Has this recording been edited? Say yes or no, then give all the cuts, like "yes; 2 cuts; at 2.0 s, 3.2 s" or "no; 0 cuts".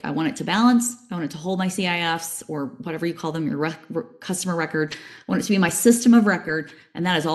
no; 0 cuts